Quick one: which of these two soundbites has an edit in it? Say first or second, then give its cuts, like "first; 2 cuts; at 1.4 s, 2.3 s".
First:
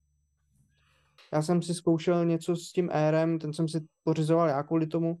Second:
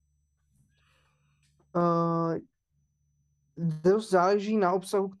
first; 1 cut; at 1.2 s